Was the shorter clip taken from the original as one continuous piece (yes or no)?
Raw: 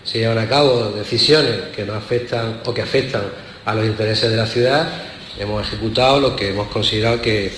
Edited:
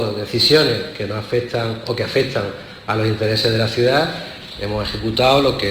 yes